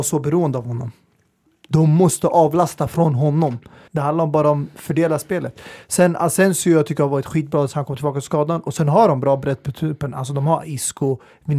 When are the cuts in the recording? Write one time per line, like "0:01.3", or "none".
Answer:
0:03.9